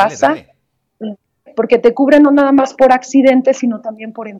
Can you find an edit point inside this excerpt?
yes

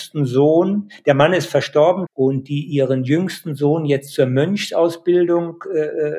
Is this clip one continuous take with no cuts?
no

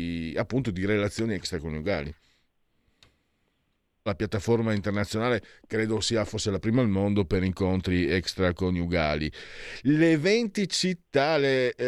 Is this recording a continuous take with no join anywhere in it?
no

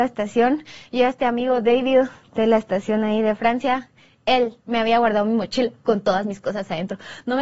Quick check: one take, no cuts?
no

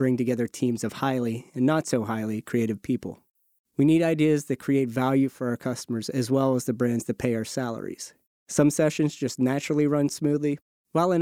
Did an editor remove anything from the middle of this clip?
yes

